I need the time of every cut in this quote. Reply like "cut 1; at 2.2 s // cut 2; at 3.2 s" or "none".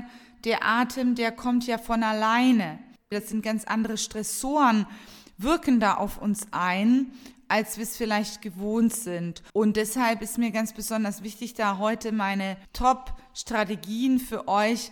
cut 1; at 3.1 s // cut 2; at 9.5 s